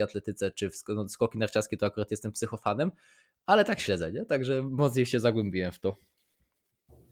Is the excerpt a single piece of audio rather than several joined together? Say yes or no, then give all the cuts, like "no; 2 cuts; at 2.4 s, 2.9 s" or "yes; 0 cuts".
yes; 0 cuts